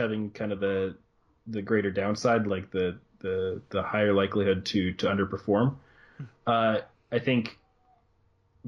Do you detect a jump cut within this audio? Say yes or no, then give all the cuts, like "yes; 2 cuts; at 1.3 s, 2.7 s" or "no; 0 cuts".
no; 0 cuts